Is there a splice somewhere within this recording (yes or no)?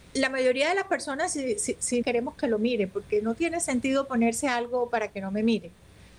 yes